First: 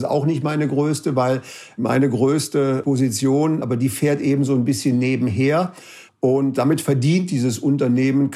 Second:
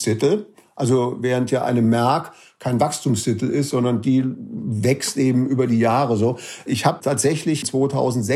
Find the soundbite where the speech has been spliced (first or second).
first